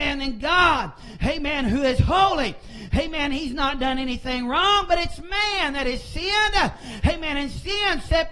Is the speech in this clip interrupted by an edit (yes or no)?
no